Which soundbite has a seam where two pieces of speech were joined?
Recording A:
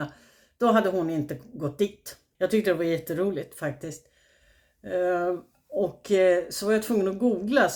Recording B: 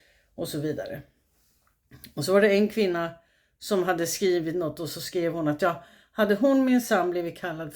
A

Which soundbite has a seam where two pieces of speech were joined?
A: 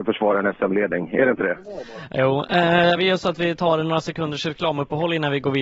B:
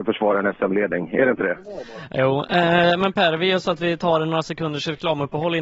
A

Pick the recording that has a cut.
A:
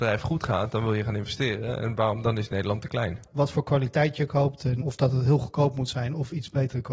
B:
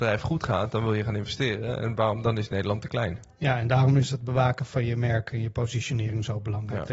A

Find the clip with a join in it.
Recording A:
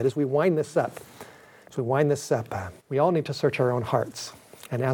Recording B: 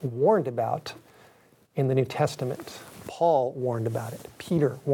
A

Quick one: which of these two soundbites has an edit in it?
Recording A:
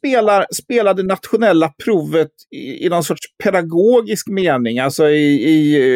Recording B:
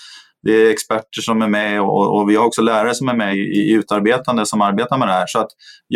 B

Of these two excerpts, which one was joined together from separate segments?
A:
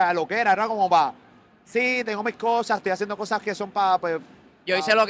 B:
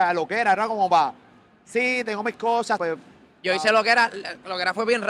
B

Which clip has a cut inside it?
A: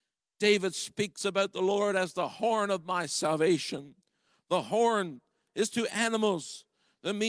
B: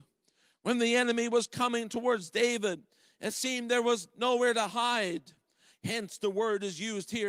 B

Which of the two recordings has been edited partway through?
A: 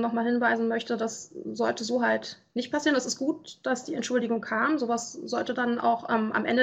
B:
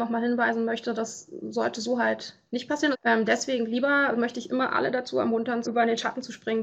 B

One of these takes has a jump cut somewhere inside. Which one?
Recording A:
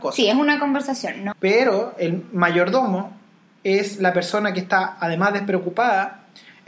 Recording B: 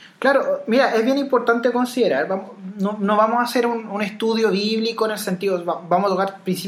A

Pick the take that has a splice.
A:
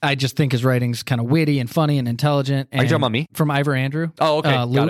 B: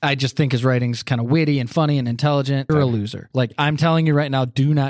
B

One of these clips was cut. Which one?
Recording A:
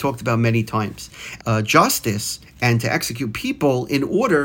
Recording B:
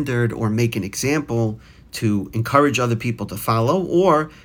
A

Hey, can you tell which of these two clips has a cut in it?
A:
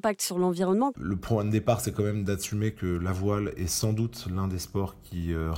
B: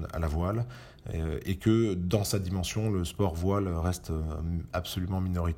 A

